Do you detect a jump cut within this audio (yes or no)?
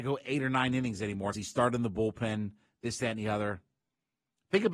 yes